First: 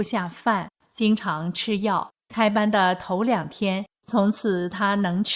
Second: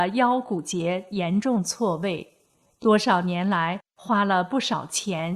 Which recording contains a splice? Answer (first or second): first